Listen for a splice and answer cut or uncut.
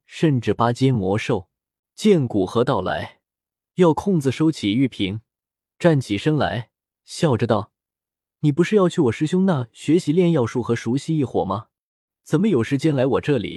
cut